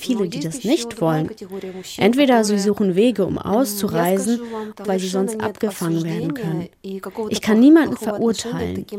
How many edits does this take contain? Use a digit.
1